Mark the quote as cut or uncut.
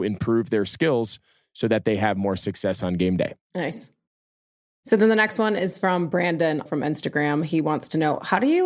cut